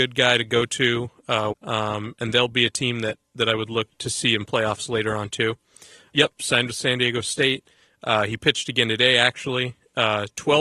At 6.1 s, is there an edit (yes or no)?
yes